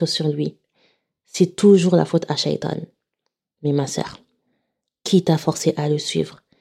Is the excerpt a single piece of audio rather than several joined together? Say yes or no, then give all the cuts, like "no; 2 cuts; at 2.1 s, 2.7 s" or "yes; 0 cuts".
yes; 0 cuts